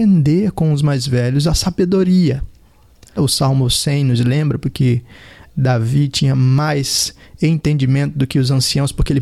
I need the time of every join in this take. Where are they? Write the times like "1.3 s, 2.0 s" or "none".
3.2 s, 4.6 s